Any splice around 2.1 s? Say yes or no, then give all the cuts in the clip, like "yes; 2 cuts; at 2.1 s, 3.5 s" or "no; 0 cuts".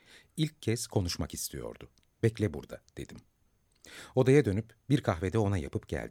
yes; 1 cut; at 2.1 s